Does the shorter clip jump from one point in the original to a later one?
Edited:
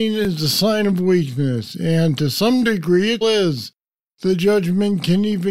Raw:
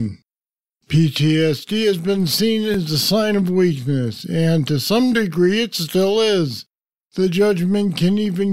yes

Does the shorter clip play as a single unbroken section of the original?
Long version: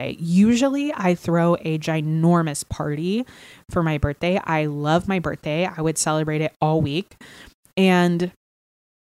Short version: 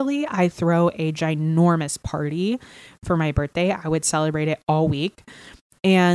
no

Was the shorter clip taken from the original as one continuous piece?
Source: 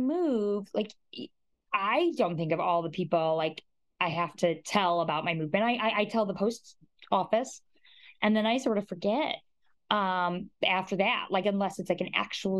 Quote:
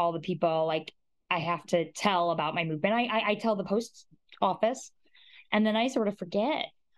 yes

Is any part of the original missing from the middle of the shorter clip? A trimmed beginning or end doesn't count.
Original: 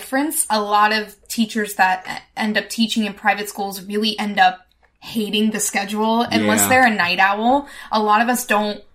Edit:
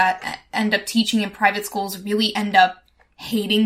no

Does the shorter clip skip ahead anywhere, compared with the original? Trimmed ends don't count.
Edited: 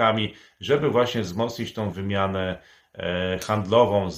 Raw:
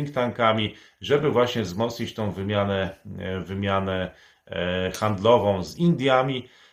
yes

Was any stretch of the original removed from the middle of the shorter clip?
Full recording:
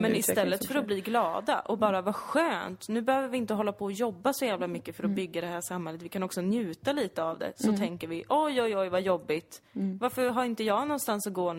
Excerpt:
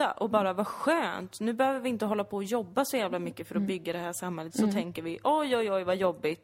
yes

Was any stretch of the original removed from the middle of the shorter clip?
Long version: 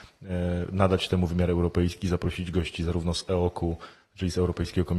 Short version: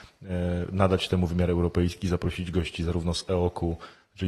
no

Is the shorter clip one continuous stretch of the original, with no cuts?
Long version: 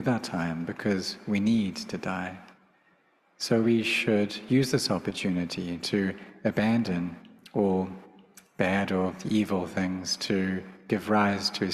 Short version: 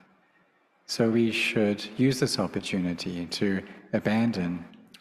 yes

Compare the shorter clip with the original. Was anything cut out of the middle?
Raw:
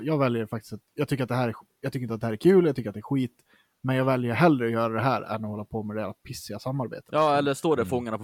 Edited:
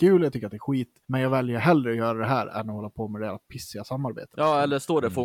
yes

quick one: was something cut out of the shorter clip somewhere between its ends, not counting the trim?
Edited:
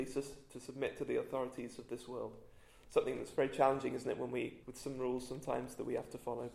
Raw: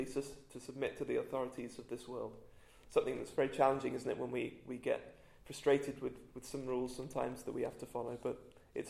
yes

